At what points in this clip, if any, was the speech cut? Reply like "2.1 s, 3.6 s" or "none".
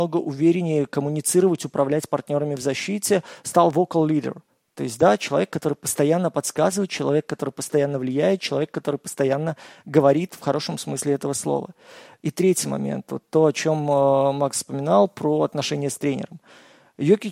none